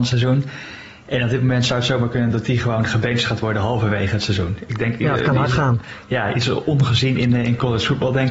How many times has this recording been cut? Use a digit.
0